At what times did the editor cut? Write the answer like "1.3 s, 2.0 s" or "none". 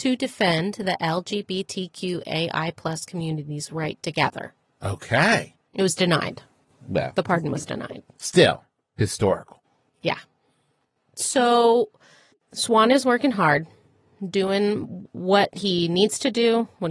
none